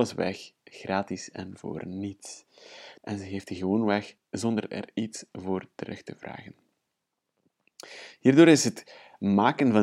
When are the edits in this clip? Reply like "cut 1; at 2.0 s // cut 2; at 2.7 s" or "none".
cut 1; at 3.0 s